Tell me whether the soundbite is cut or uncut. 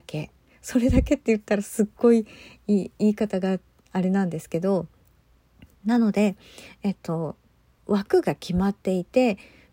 uncut